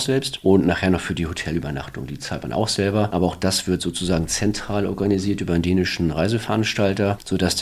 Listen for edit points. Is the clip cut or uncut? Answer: uncut